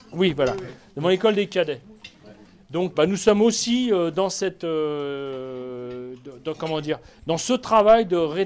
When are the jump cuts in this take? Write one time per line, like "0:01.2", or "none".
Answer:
0:02.9